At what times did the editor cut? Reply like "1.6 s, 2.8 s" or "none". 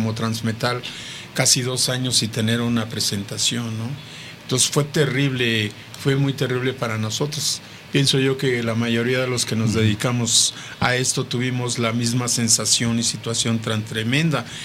none